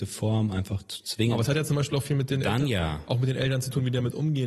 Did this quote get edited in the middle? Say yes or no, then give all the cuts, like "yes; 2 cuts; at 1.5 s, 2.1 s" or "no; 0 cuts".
no; 0 cuts